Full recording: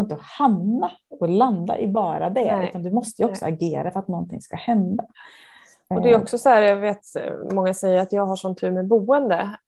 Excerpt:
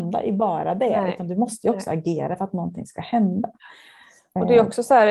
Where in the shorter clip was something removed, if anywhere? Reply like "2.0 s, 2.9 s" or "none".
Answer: none